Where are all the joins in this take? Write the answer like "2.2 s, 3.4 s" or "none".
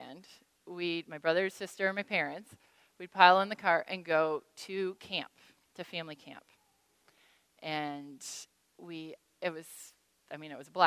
none